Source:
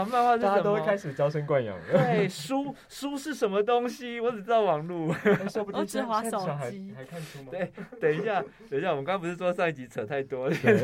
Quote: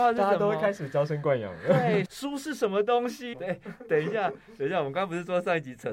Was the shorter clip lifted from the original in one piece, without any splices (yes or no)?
no